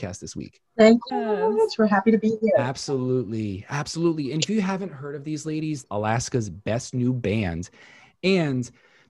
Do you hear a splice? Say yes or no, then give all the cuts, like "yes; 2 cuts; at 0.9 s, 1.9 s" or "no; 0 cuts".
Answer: yes; 2 cuts; at 1.1 s, 5.8 s